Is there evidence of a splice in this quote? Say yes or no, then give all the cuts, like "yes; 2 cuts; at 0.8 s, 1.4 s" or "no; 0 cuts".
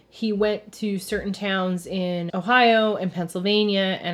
yes; 1 cut; at 2.3 s